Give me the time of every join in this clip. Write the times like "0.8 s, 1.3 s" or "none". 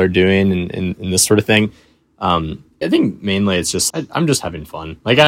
2.8 s, 3.9 s